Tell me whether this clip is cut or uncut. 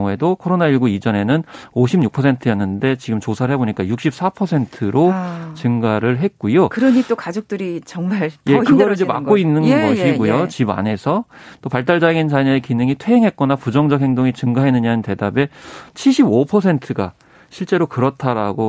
uncut